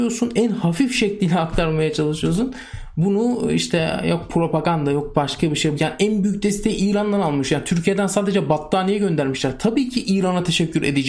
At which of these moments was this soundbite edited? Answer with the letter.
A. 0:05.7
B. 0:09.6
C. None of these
A